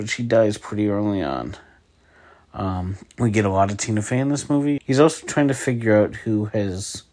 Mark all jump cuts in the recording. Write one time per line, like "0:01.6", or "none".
0:03.1
0:04.8